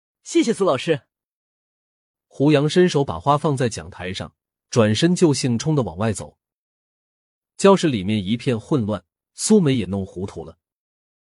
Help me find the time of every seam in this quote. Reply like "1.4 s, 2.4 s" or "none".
5.6 s